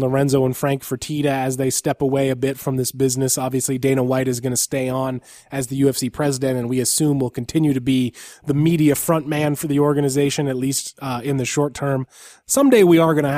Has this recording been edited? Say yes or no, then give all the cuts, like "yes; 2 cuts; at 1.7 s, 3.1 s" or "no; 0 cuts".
no; 0 cuts